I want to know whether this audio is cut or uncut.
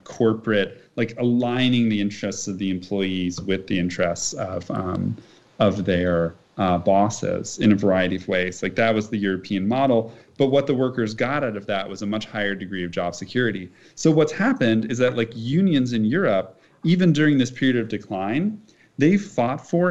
uncut